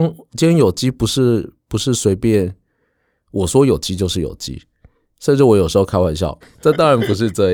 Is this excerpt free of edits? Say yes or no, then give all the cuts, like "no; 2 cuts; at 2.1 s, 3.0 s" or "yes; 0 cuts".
no; 1 cut; at 6.4 s